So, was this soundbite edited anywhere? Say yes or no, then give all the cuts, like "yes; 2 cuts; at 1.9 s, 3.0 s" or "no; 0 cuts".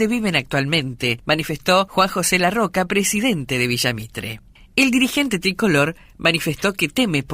no; 0 cuts